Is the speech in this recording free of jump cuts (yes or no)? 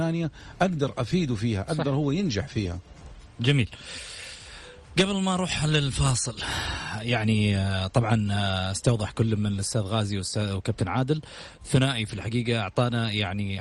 yes